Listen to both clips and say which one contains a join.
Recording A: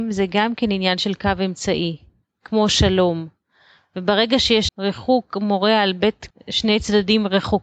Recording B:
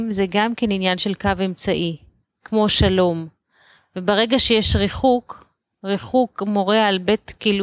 A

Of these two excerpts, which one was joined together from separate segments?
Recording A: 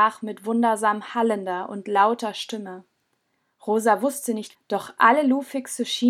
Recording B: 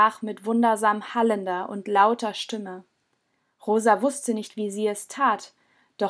A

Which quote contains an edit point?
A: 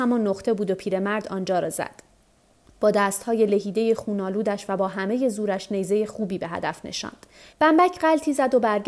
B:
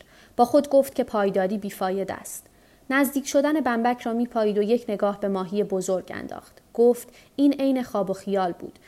A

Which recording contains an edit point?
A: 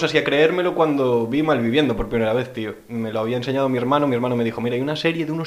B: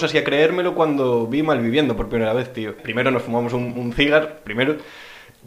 B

